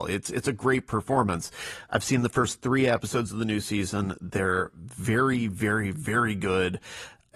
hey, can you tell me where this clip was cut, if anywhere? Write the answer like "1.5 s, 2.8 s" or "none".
none